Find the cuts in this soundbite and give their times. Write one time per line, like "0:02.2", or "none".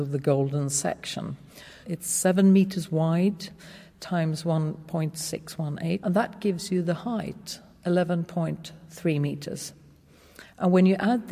0:01.8
0:06.0